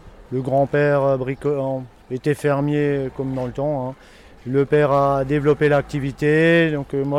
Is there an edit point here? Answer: no; 0 cuts

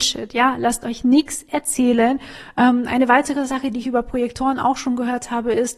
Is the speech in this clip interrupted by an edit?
no; 0 cuts

